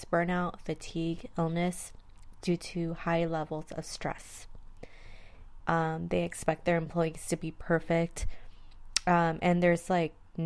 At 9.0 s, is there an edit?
no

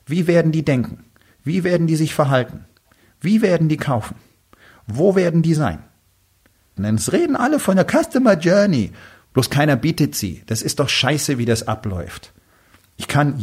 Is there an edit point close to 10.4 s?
no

